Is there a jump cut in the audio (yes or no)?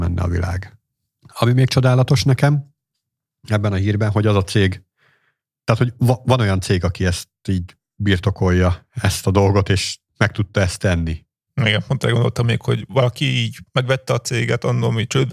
yes